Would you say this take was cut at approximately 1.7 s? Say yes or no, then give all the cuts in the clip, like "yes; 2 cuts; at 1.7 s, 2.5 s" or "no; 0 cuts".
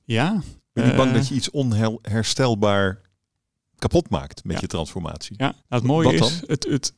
no; 1 cut; at 5.6 s